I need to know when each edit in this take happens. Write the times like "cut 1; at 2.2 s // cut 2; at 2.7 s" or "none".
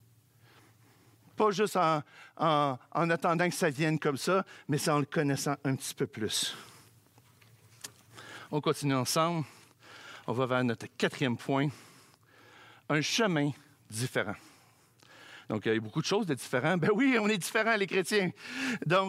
none